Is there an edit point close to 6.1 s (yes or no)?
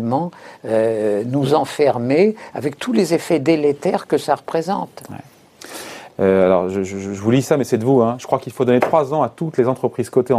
yes